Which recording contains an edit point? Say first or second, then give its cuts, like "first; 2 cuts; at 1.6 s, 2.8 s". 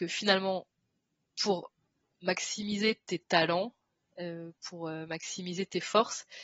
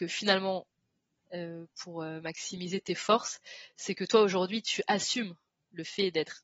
second; 1 cut; at 1.2 s